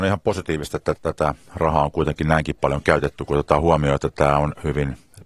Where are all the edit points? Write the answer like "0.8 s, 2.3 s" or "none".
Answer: 0.9 s